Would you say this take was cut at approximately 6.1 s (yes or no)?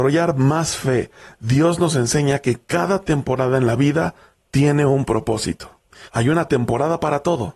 yes